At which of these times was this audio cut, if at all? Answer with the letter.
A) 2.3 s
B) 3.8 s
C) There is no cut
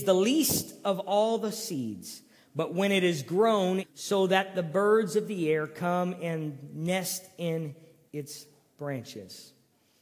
B